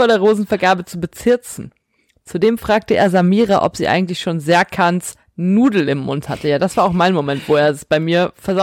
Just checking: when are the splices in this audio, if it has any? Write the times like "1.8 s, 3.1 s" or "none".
none